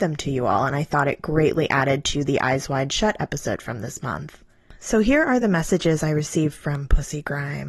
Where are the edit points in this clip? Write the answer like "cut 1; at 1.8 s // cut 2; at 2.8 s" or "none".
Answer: none